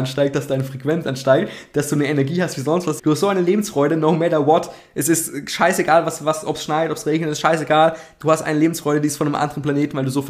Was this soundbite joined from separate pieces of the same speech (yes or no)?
yes